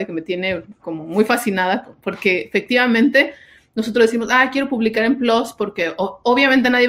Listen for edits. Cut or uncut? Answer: uncut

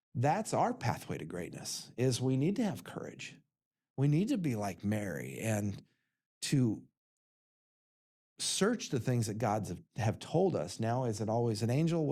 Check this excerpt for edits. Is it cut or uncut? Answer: uncut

